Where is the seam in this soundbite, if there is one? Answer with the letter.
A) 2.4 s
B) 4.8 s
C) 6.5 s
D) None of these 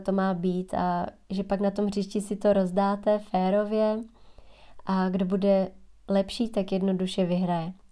D